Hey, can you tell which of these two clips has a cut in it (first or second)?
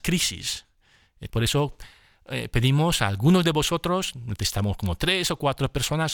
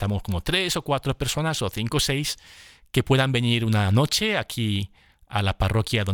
first